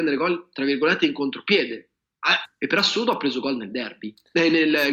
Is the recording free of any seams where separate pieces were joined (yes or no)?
no